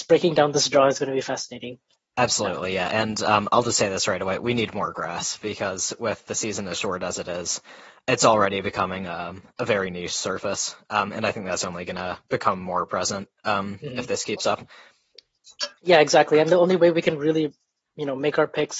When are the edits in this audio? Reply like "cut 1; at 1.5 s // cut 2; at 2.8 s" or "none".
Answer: cut 1; at 12.2 s // cut 2; at 15.8 s